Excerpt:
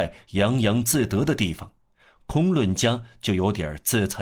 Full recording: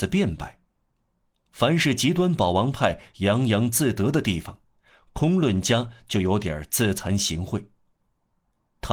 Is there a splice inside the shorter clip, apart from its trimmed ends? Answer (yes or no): no